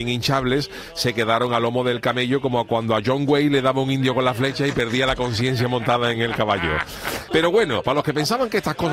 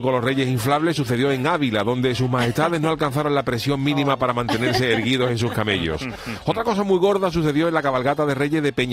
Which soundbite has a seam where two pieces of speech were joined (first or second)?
first